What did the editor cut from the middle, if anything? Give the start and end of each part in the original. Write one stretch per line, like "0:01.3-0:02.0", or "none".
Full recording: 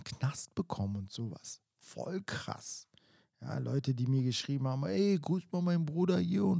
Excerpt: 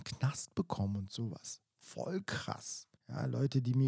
0:03.0-0:03.3